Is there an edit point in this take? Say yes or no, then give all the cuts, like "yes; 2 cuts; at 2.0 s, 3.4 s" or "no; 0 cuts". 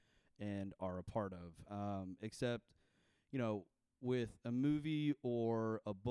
no; 0 cuts